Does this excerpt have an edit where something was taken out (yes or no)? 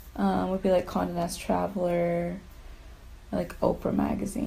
yes